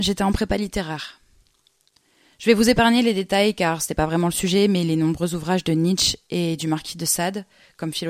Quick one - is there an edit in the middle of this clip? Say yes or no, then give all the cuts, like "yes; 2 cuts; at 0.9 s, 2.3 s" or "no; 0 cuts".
no; 0 cuts